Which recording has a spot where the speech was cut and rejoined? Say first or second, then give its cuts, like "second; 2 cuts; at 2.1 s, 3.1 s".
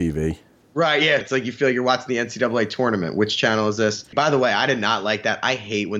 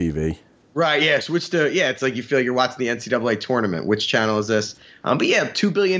first; 2 cuts; at 1.2 s, 4.1 s